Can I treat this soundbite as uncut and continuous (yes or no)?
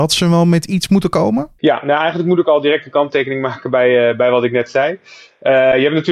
yes